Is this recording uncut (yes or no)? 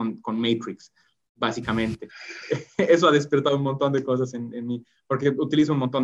yes